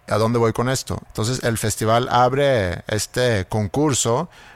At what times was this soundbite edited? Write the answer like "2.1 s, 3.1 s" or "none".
1.1 s